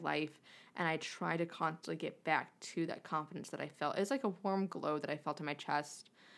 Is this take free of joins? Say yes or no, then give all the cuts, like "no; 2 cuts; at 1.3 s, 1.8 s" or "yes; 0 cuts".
yes; 0 cuts